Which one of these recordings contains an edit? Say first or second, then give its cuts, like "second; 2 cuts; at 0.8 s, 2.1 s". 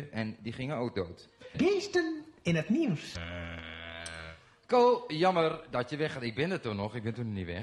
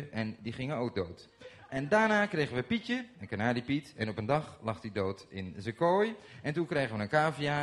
first; 1 cut; at 1.5 s